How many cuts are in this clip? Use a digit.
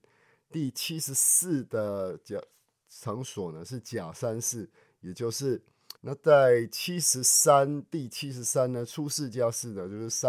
1